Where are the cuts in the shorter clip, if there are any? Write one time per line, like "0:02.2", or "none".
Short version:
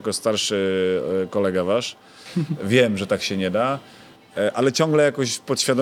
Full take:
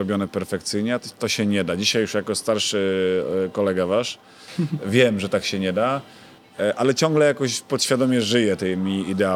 none